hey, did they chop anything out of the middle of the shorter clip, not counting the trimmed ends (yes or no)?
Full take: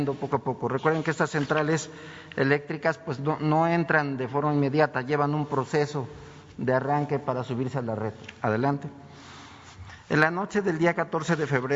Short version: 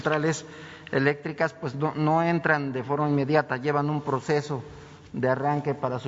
no